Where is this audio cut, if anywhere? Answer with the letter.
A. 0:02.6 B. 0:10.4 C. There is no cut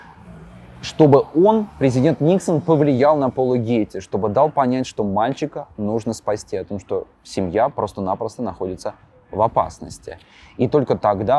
C